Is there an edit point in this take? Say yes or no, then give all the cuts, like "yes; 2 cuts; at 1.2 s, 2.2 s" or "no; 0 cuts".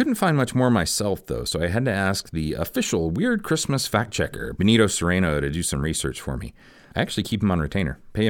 no; 0 cuts